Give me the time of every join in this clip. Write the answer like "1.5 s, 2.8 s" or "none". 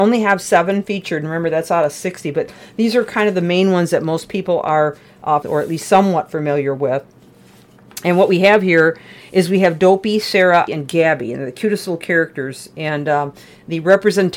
5.4 s, 10.7 s